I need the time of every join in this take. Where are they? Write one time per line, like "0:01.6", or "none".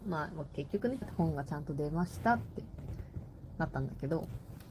0:01.0

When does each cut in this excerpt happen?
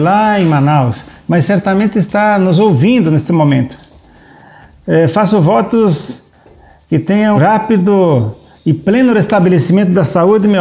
0:07.3

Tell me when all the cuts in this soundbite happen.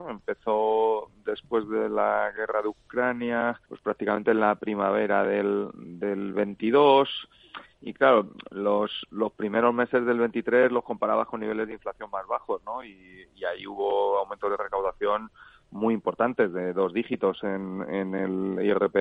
0:03.6

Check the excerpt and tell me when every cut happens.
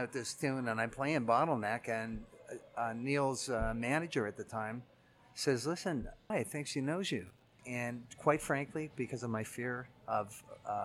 0:06.3
0:07.6

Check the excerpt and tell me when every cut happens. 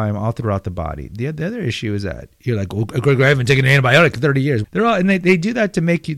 0:04.6

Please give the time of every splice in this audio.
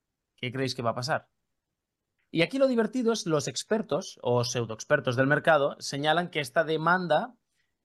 0:02.2

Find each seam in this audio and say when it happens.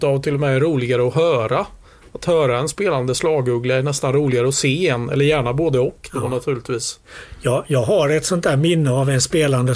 none

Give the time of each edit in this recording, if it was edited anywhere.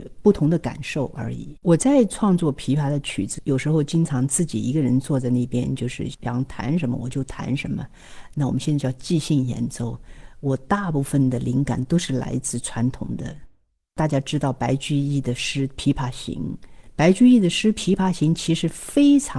0:01.6

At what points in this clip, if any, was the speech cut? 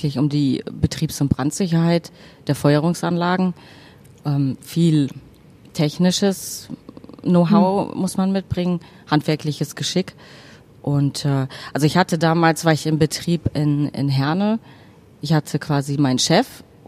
none

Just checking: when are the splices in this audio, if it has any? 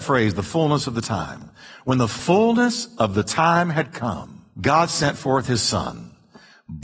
none

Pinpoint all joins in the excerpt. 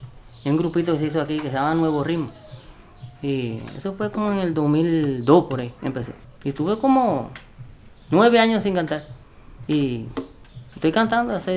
0:06.4
0:09.6

